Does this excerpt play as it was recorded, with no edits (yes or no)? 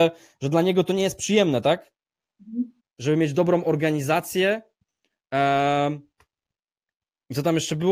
no